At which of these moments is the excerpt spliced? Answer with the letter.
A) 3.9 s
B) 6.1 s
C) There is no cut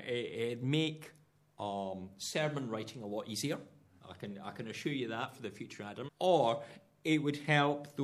B